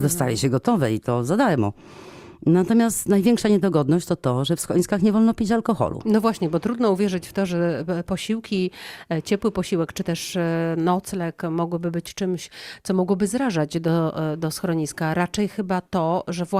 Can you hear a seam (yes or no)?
no